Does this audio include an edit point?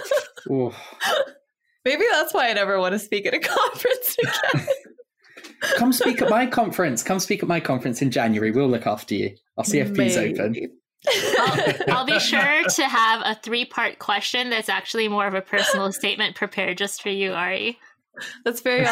no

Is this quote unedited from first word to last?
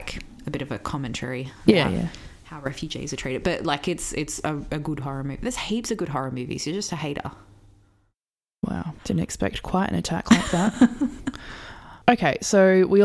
yes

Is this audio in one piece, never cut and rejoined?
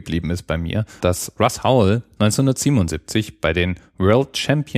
no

